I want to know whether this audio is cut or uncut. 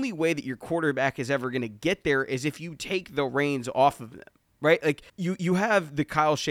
cut